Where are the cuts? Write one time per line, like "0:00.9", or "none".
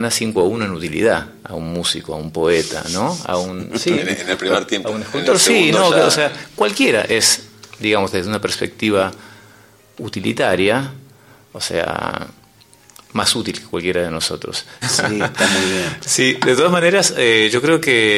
0:14.8